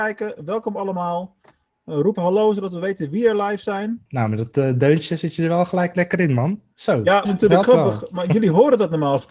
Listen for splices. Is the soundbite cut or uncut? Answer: cut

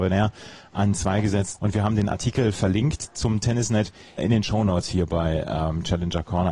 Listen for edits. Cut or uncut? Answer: cut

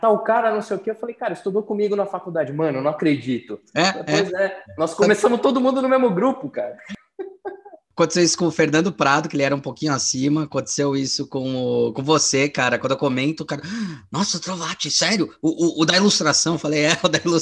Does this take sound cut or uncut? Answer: uncut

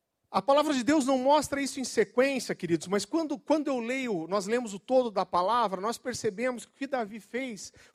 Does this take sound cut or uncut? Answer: uncut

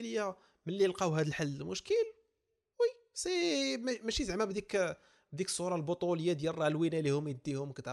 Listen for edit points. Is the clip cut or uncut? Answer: uncut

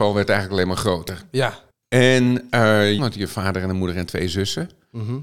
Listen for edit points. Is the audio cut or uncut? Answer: cut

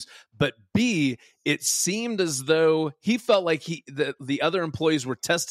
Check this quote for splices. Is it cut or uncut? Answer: uncut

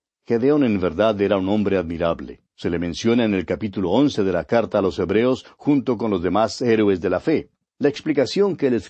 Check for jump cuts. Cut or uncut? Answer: cut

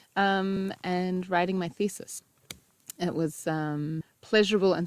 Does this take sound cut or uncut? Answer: uncut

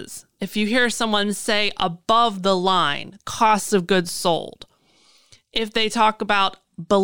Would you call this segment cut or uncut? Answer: cut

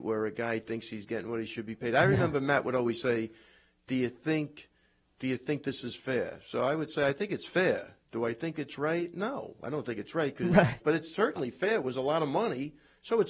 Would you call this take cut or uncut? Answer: cut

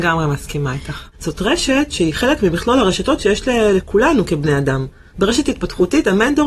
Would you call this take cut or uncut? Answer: cut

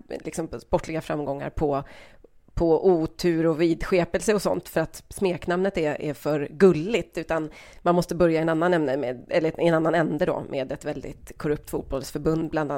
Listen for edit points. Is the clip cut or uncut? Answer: uncut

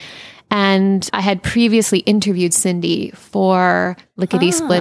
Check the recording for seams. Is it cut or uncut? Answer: cut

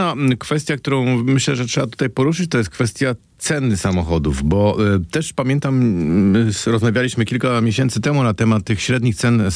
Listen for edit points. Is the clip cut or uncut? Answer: uncut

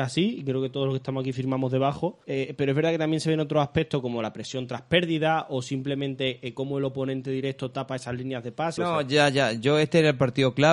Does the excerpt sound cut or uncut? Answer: cut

